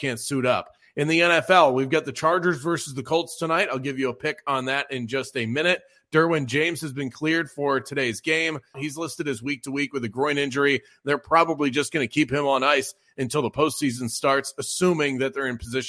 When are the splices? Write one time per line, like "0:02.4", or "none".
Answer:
0:08.7